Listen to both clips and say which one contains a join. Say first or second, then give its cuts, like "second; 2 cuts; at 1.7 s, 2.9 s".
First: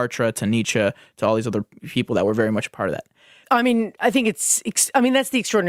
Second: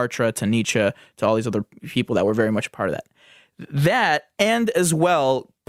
first; 1 cut; at 3.4 s